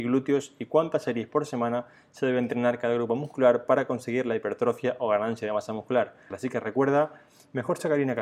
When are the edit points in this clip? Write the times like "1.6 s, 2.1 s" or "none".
6.3 s